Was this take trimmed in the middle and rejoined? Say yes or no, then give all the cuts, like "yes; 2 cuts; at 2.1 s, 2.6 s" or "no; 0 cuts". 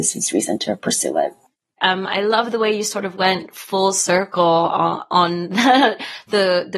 yes; 1 cut; at 1.8 s